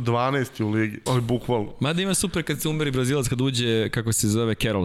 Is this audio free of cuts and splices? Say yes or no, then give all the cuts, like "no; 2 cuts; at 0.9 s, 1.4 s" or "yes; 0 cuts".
no; 1 cut; at 1.1 s